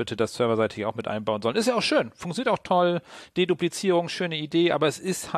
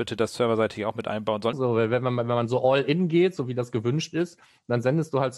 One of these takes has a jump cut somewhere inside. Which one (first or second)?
second